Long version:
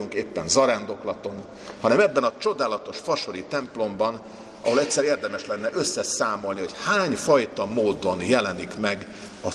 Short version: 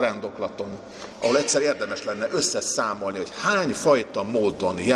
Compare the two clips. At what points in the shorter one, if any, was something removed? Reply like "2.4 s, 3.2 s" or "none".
1.1 s